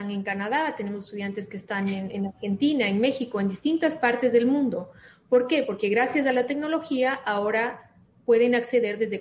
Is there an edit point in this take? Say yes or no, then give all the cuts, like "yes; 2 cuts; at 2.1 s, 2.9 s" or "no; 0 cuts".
no; 0 cuts